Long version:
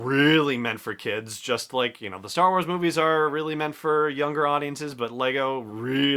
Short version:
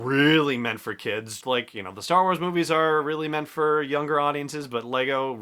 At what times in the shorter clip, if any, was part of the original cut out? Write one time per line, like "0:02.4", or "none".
0:01.4